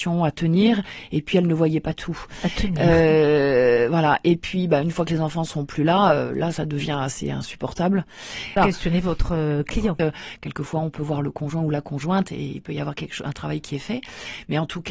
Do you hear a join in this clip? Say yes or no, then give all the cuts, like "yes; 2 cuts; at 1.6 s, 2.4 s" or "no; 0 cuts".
yes; 2 cuts; at 8.6 s, 10.0 s